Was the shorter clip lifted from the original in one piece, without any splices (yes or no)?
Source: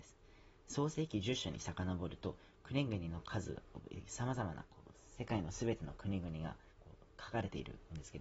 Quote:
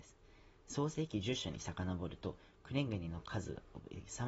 yes